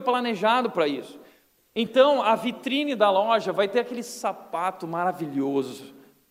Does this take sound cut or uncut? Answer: uncut